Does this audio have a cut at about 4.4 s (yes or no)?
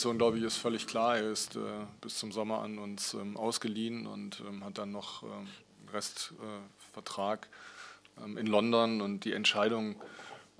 no